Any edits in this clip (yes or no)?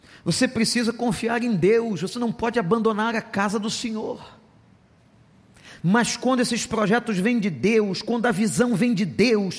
yes